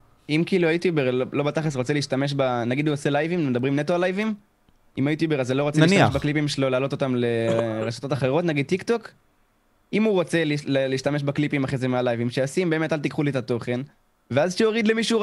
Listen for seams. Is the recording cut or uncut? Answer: uncut